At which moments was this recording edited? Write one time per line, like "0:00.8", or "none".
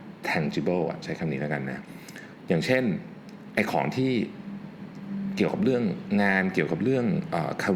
none